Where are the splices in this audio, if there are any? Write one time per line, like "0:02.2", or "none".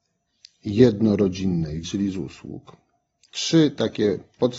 0:01.8